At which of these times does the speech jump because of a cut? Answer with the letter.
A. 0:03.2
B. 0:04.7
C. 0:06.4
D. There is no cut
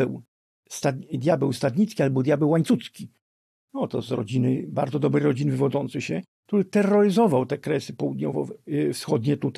D